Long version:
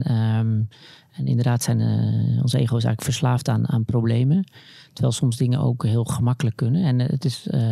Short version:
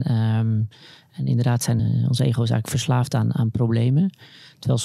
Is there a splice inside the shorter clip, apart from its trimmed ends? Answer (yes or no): yes